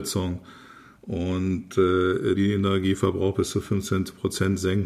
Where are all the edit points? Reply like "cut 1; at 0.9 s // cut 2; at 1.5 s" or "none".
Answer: cut 1; at 2.3 s